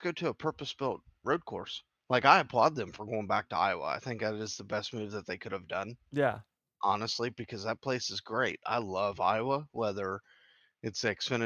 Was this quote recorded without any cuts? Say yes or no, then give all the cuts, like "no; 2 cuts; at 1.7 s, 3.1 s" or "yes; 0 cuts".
yes; 0 cuts